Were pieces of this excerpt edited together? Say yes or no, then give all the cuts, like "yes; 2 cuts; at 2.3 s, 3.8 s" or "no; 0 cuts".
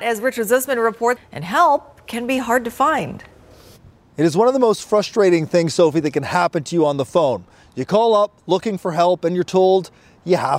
yes; 1 cut; at 1.2 s